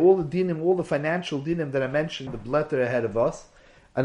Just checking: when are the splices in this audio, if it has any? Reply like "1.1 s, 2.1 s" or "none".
2.3 s